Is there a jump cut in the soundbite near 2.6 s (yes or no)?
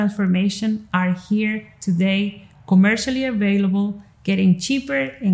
no